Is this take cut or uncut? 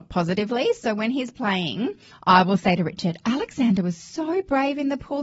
uncut